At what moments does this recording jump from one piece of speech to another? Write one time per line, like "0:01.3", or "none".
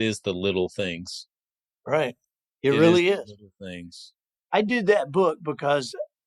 none